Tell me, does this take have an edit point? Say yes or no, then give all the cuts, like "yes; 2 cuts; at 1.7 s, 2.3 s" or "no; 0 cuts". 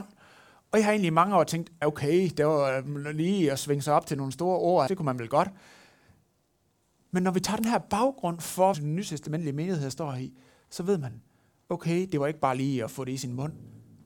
yes; 3 cuts; at 1.8 s, 4.9 s, 8.7 s